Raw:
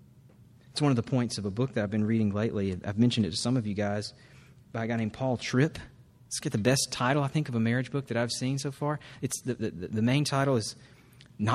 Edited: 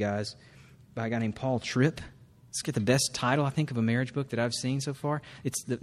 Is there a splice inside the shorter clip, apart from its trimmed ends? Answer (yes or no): no